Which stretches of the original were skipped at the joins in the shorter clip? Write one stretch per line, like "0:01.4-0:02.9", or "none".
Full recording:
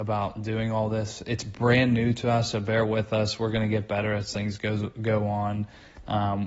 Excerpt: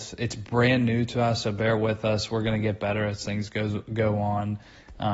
none